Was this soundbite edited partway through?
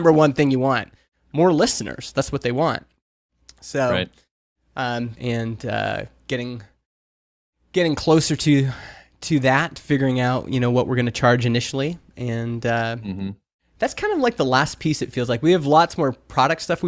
yes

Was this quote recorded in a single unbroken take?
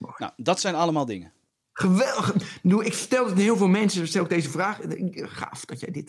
yes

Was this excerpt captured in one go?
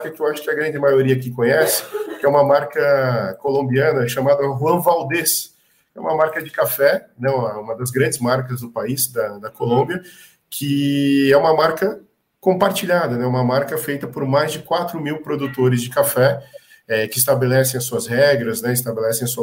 yes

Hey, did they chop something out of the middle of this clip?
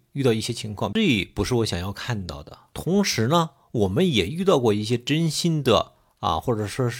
yes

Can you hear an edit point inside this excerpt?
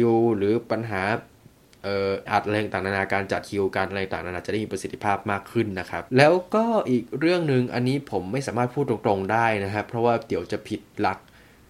yes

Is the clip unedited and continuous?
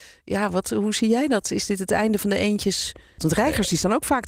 no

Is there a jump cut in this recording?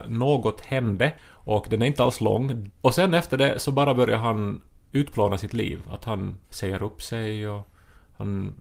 yes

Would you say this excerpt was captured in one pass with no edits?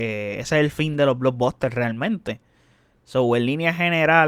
yes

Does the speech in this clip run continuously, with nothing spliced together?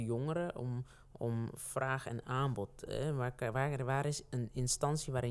yes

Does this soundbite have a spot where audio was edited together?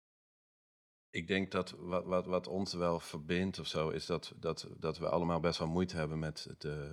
no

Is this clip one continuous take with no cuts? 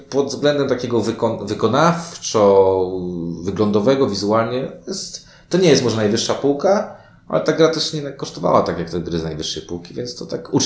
yes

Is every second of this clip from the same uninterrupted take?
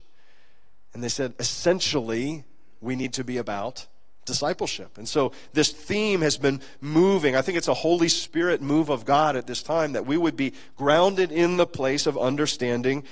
yes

